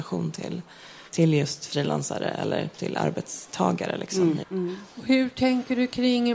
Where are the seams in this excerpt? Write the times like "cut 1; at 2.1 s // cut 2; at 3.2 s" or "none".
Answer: cut 1; at 1.1 s // cut 2; at 4.4 s

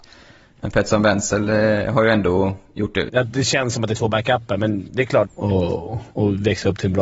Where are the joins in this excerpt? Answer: cut 1; at 3.1 s // cut 2; at 5.3 s

